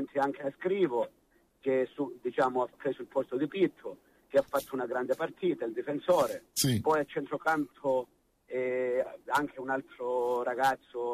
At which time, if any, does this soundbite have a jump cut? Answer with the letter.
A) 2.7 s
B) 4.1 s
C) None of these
A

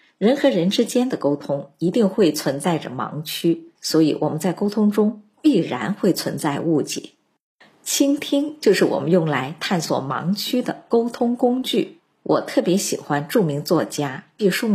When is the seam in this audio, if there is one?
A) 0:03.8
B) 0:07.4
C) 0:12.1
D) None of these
A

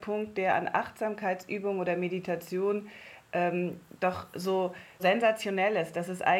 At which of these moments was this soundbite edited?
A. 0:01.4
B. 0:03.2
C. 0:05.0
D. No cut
C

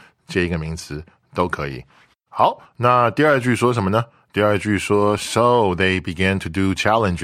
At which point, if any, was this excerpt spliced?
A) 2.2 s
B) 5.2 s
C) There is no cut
C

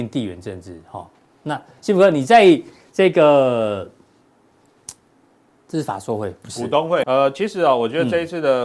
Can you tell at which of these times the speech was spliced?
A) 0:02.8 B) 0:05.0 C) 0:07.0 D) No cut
C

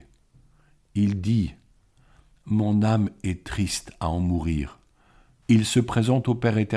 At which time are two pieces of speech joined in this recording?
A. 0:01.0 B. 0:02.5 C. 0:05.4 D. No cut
C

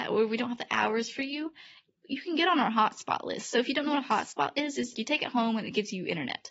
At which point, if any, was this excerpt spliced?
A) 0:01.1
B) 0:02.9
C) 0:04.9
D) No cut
C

